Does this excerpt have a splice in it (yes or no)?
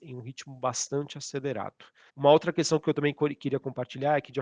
yes